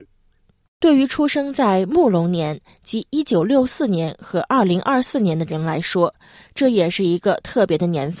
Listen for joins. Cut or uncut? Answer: uncut